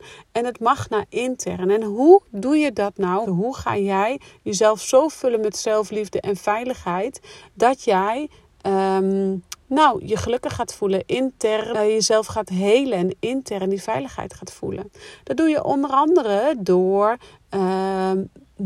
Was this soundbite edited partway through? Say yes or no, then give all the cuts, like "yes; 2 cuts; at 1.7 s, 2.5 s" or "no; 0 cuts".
yes; 2 cuts; at 3.3 s, 11.7 s